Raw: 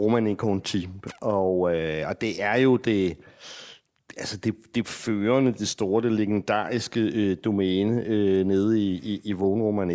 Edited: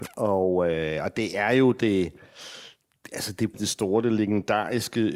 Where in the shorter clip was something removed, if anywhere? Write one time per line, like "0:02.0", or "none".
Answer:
0:03.5